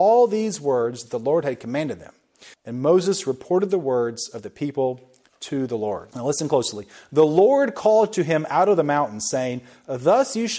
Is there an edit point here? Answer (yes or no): yes